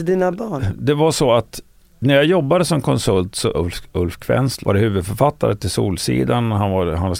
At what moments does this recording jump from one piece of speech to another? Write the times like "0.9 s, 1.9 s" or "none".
3.5 s, 4.6 s